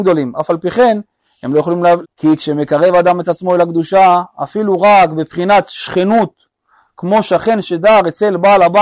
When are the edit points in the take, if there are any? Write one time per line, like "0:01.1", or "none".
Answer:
0:02.0